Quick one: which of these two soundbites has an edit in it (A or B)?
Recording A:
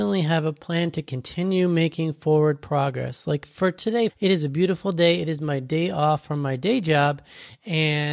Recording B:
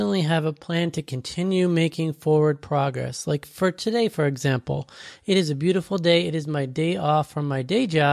A